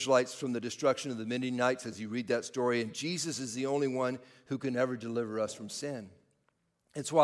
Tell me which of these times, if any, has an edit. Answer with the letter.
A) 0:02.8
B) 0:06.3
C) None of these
C